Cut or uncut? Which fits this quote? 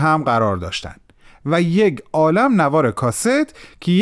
uncut